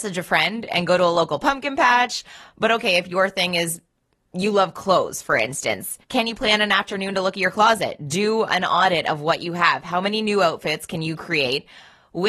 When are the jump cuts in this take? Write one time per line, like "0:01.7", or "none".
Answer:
0:06.0